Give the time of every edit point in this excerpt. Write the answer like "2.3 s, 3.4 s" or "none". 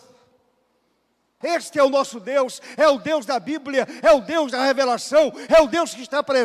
1.4 s